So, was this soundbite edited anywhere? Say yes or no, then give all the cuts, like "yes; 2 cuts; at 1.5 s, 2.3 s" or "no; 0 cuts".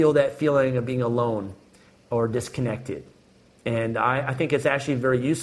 no; 0 cuts